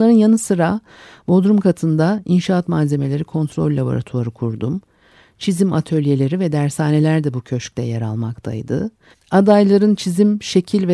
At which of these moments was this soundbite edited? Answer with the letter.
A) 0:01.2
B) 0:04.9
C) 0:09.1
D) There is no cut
C